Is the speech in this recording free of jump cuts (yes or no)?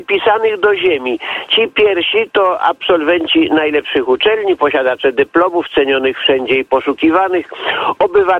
yes